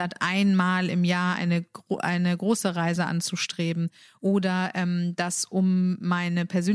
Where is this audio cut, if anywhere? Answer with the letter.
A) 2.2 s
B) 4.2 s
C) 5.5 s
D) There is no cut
D